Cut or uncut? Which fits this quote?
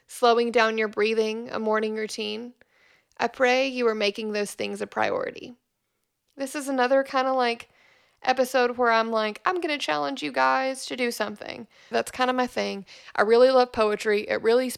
cut